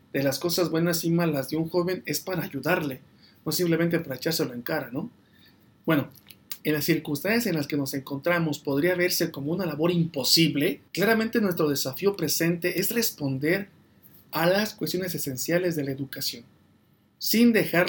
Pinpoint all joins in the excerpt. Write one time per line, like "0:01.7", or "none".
0:06.6
0:10.9